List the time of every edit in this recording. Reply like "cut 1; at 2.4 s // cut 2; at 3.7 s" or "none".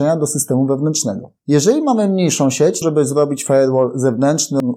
cut 1; at 1.4 s // cut 2; at 2.8 s